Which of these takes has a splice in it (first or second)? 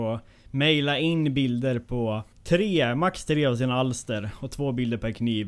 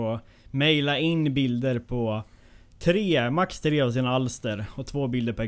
first